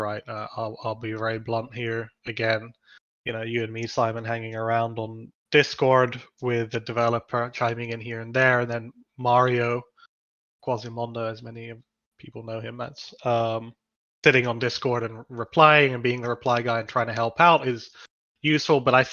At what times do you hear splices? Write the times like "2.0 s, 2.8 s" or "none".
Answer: none